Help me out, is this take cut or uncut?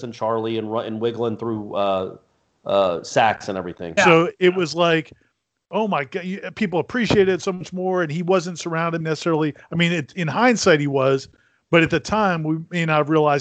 cut